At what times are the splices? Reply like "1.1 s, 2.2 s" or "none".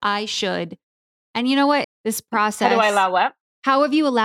1.8 s